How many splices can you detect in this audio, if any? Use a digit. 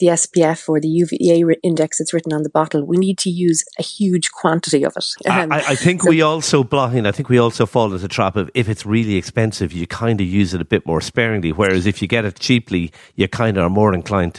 1